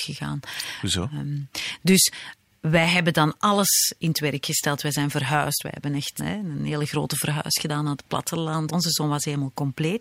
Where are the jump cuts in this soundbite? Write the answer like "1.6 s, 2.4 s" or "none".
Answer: 6.2 s, 8.7 s